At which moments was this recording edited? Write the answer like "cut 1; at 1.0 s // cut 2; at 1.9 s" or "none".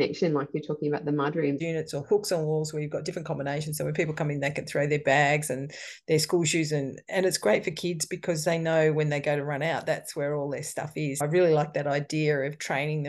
cut 1; at 1.6 s